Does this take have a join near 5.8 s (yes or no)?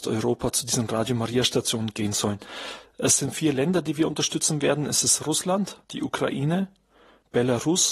yes